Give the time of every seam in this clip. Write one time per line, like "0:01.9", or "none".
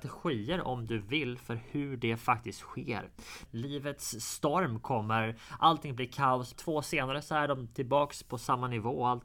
0:03.5
0:06.5